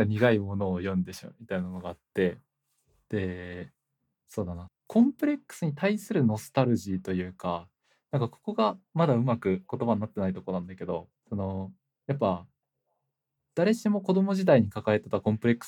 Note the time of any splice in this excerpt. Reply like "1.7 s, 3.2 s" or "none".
4.7 s, 11.2 s